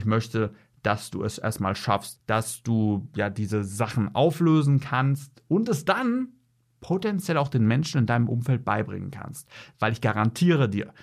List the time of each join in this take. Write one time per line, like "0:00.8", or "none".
0:02.2